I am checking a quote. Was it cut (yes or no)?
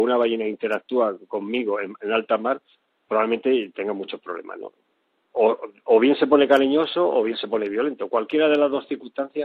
no